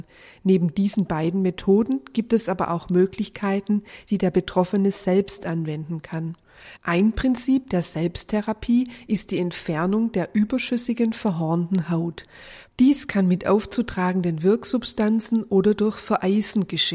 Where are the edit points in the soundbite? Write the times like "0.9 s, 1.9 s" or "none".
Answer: 6.8 s